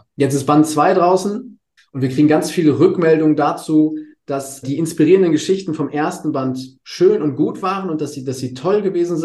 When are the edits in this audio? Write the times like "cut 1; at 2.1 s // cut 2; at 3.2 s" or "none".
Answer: cut 1; at 1.8 s // cut 2; at 4.6 s

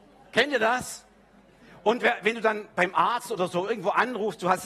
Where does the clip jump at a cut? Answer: none

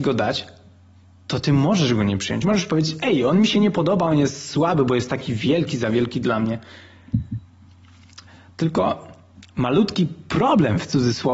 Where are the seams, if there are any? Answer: none

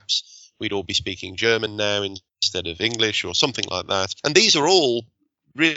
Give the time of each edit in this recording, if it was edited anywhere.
none

